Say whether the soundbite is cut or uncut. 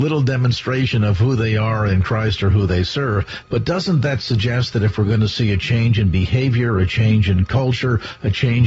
cut